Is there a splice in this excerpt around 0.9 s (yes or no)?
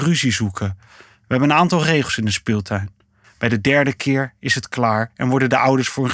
no